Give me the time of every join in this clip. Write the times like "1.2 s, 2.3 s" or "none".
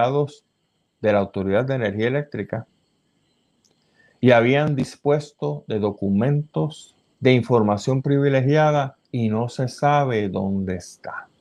7.1 s, 9.0 s